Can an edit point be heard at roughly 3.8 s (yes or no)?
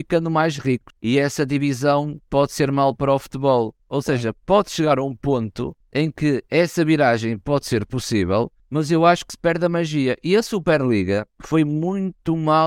yes